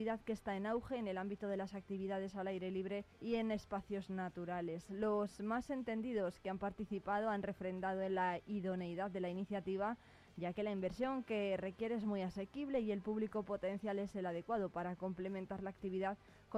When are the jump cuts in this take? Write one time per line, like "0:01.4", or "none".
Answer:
0:03.1